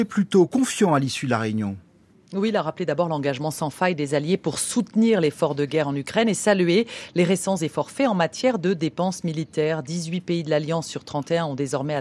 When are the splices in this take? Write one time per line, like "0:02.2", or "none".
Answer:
none